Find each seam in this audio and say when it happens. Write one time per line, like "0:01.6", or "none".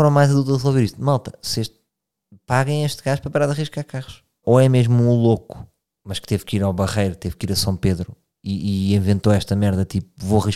0:04.4